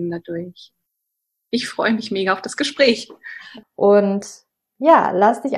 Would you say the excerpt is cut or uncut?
cut